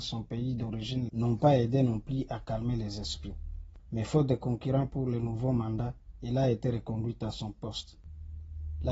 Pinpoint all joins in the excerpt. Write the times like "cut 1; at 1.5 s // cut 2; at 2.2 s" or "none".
cut 1; at 1.1 s // cut 2; at 3.8 s